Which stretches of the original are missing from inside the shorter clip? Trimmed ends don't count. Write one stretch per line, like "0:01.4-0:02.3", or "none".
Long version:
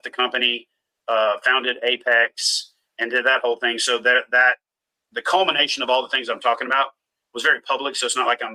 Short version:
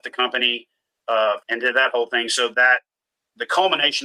0:01.4-0:02.9
0:04.0-0:04.3